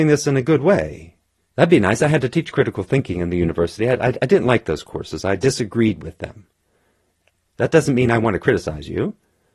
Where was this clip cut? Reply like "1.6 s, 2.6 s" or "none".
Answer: 1.4 s, 7.5 s